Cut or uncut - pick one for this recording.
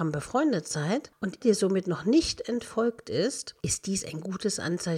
cut